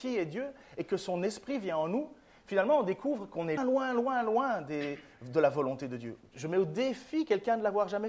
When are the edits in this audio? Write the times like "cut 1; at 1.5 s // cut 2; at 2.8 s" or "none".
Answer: cut 1; at 3.6 s // cut 2; at 6.2 s